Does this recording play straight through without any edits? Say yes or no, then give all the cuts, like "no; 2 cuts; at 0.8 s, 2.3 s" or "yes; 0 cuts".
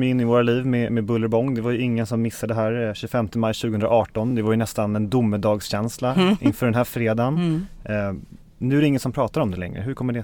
yes; 0 cuts